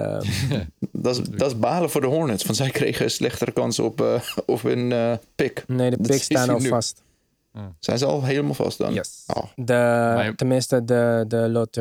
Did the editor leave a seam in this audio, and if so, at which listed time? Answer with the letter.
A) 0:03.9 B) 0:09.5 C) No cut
B